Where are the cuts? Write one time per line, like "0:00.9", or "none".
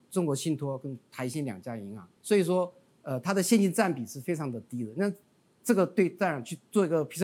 0:02.2